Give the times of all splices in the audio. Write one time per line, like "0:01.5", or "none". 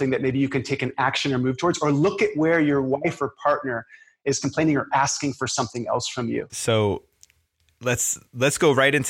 0:06.5